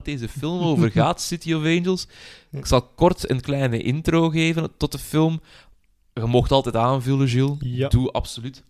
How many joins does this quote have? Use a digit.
0